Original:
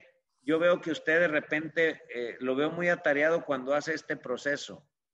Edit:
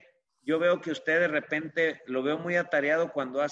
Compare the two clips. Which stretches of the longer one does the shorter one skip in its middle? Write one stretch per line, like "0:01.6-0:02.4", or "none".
0:02.1-0:02.4

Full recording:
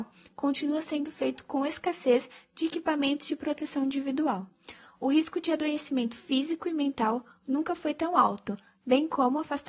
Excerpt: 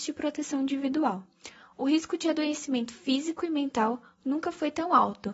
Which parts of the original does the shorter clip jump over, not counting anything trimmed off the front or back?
none

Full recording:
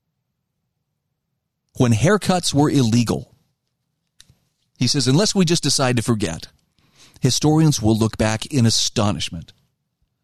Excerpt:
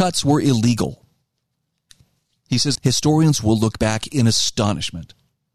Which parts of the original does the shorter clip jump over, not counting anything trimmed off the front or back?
0:05.0-0:07.1

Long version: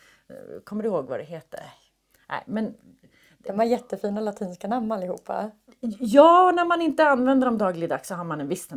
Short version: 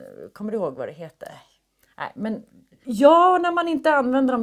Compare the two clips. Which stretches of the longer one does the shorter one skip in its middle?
0:03.2-0:06.0

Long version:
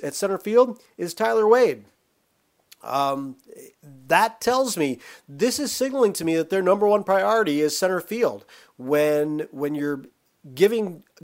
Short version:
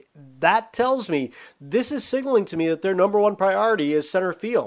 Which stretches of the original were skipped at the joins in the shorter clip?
none

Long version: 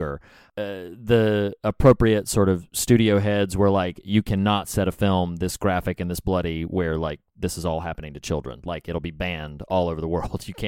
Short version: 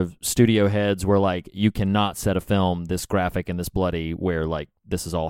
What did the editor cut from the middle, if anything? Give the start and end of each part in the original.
none

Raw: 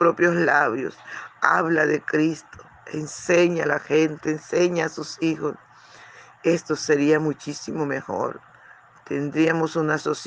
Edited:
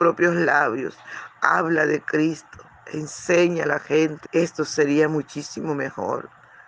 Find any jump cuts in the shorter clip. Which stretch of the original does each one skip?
0:04.2-0:06.4

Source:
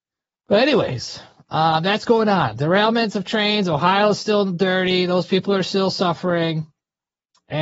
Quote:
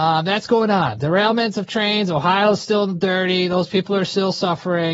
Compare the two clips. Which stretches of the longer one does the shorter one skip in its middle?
none

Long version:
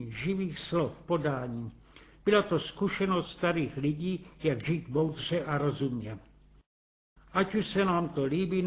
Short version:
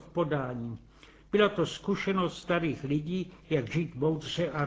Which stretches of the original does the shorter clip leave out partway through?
none

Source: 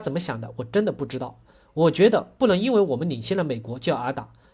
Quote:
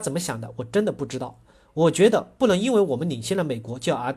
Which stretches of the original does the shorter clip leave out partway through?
none

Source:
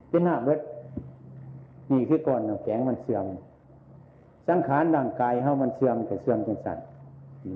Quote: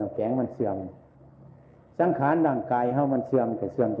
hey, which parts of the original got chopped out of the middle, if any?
none

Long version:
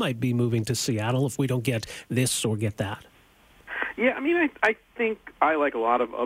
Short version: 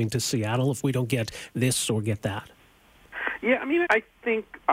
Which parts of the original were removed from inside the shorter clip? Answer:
0:04.4-0:04.6

